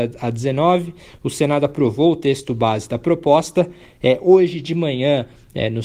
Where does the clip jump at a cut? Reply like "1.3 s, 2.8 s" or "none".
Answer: none

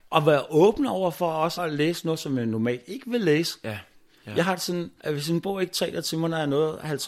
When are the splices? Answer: 1.6 s, 5.0 s

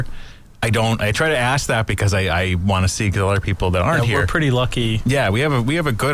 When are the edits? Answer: none

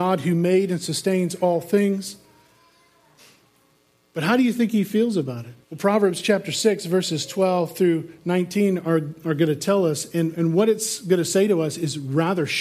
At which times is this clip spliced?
5.6 s

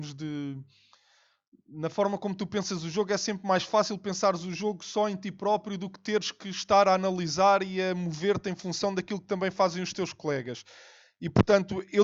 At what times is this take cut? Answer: none

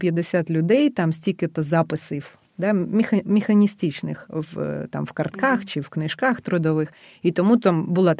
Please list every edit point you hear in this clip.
none

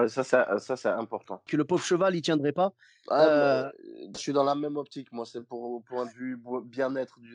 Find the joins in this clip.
1.5 s, 4.1 s

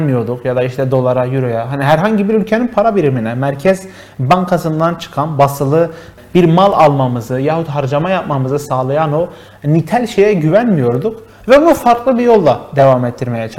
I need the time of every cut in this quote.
none

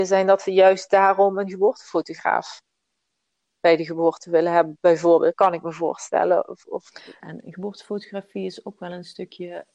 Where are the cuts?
7.2 s

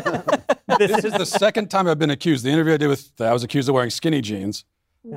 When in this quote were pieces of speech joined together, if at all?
3.2 s

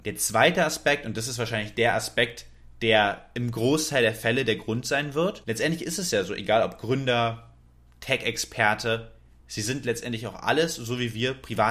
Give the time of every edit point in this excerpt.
none

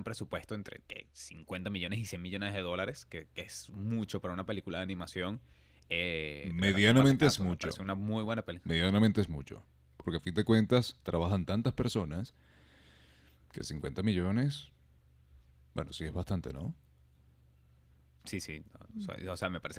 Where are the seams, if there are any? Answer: none

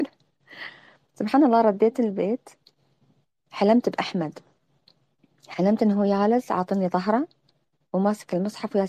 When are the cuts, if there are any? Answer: none

